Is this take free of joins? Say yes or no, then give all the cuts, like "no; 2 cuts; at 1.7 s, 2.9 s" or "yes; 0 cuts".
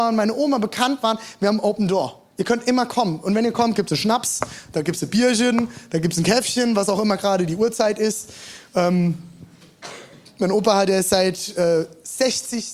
yes; 0 cuts